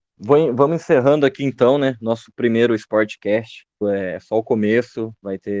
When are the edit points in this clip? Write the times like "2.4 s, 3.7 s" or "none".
3.8 s